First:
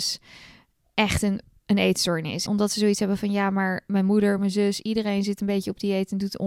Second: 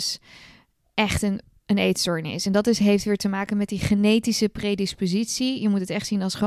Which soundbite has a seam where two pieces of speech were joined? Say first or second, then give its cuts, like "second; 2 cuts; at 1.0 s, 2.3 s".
first; 2 cuts; at 2.5 s, 4.4 s